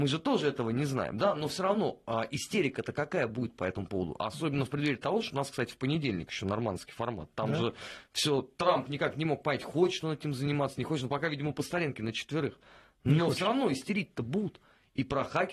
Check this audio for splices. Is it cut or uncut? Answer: uncut